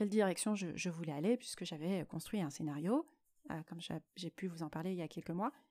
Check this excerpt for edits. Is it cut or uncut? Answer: uncut